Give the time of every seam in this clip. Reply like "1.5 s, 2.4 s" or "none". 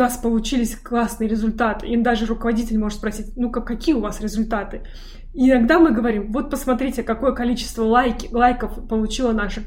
none